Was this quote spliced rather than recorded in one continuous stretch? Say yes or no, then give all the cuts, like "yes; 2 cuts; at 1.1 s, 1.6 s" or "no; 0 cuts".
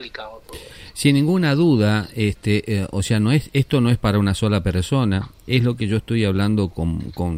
no; 0 cuts